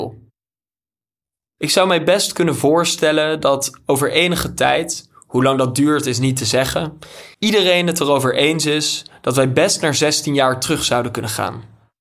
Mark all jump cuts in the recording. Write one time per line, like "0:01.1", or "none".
0:01.5
0:07.3